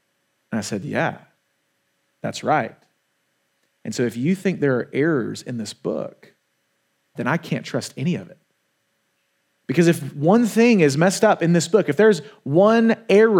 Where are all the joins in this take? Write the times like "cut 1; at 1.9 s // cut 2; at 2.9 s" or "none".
cut 1; at 7.1 s